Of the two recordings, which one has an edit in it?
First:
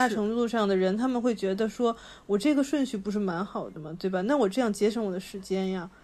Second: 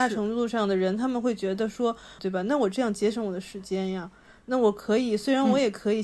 second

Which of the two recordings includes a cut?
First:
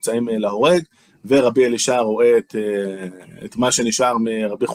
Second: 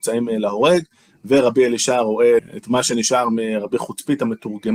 second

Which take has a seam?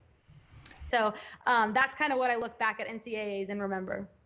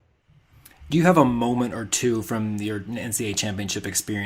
first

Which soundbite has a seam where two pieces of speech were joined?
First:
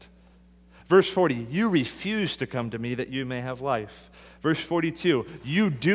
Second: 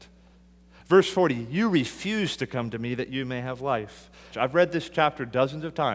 second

